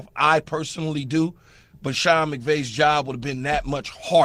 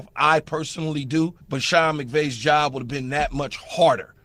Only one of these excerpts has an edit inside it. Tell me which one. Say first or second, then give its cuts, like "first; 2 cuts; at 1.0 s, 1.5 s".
second; 1 cut; at 1.4 s